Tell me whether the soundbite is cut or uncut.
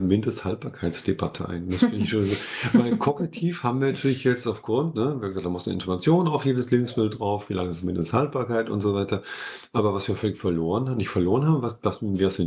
uncut